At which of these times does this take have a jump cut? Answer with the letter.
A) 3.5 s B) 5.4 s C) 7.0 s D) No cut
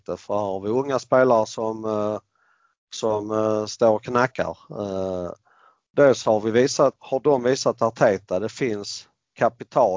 C